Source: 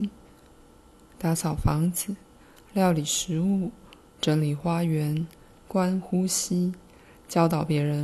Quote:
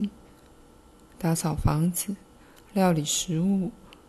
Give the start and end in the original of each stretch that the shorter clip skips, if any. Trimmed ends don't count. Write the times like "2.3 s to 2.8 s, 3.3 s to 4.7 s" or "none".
none